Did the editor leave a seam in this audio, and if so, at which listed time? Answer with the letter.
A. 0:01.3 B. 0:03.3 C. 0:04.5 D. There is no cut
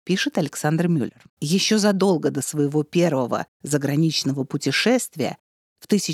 A